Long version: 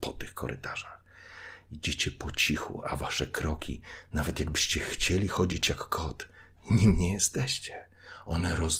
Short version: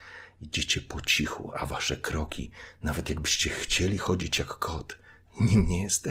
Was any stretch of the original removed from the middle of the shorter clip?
no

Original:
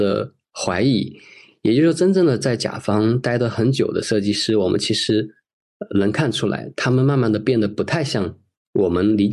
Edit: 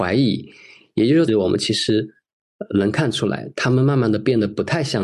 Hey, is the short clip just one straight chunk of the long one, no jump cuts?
no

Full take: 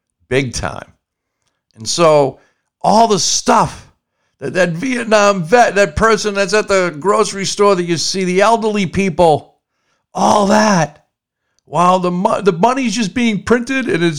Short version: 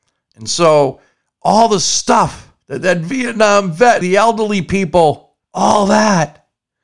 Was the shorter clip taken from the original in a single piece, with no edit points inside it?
no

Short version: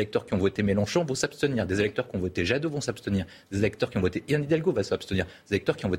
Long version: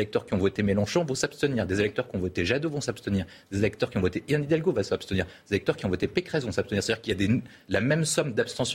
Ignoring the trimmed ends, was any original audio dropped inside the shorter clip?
no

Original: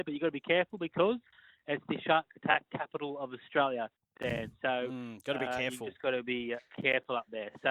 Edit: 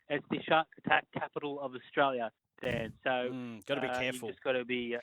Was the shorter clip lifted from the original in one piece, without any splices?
yes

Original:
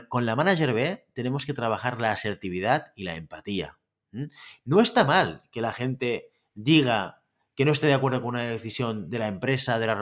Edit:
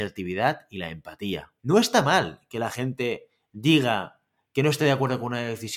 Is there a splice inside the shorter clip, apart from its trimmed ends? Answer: yes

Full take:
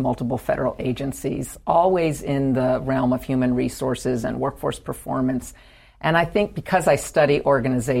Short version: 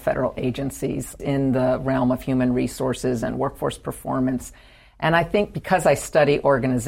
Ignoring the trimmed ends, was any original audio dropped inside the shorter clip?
yes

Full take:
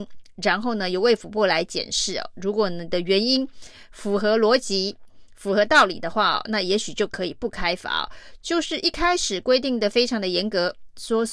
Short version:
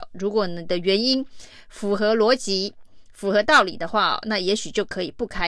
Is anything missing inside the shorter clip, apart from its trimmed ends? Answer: no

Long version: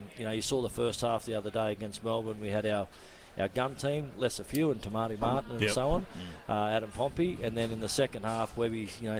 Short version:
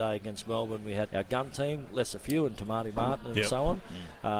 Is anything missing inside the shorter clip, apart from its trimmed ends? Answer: yes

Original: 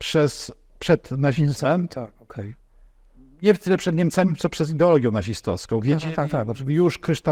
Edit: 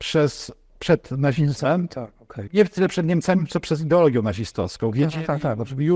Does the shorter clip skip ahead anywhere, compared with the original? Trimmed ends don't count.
yes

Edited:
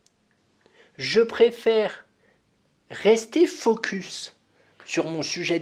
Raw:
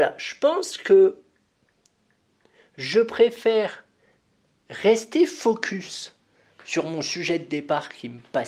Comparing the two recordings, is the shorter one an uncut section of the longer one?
yes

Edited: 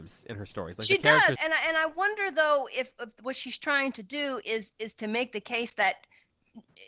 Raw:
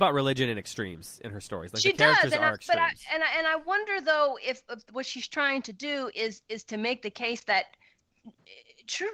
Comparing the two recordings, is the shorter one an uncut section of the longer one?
no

